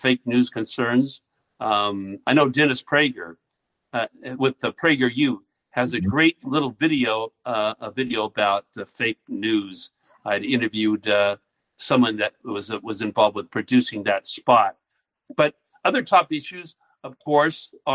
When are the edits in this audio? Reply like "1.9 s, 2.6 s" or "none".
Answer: 2.2 s